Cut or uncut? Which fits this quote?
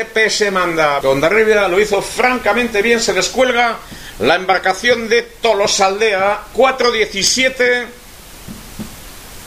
cut